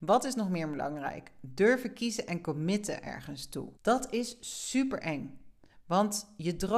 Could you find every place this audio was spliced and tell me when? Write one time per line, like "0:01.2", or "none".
0:03.8

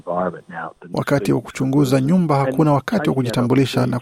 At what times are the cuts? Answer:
0:00.9

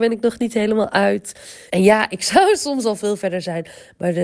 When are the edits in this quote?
0:01.7

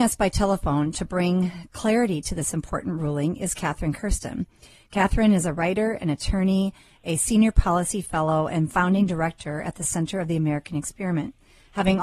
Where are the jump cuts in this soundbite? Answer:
none

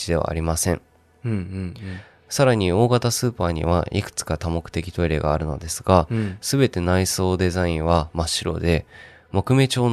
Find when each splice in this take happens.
none

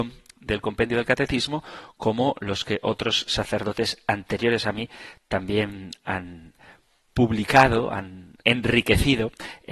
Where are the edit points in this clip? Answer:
0:08.4

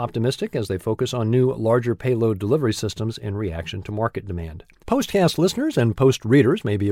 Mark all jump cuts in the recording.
0:04.8

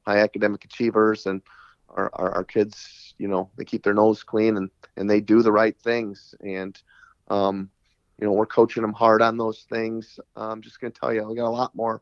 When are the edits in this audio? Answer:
0:10.2

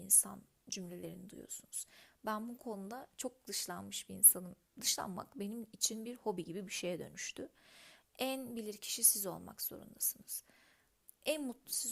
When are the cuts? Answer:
0:04.6
0:08.0

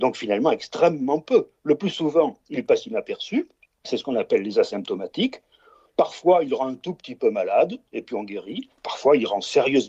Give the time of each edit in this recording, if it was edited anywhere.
none

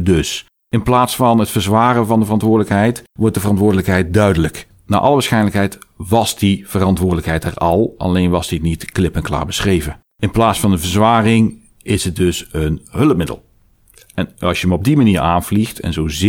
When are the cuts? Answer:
0:10.1

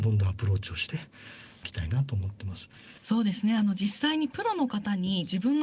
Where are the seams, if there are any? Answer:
0:03.0

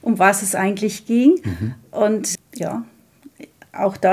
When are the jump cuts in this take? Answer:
0:02.4

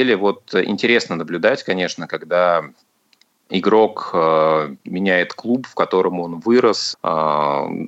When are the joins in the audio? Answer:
0:03.5
0:06.9

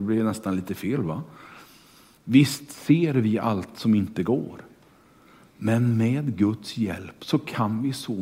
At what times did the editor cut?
0:02.2

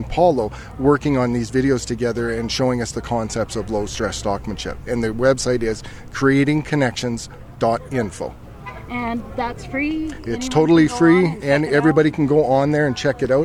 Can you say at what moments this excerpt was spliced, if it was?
none

